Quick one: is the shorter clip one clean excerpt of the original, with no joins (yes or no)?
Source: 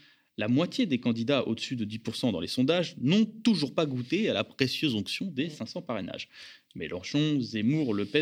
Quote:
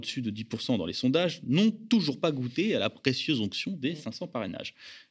yes